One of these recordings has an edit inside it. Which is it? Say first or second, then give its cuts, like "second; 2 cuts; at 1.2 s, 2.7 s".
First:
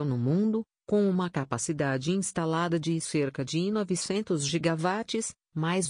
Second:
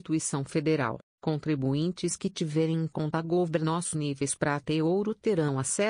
second; 1 cut; at 1.1 s